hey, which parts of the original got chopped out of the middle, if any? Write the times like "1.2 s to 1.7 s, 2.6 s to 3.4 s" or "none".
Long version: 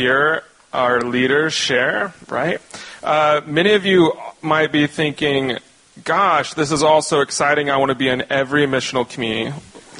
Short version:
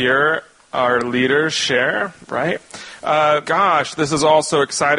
3.4 s to 6.0 s